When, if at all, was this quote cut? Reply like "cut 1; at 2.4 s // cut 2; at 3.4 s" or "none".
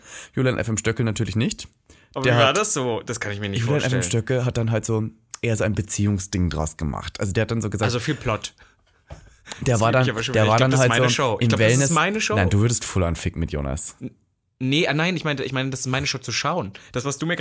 none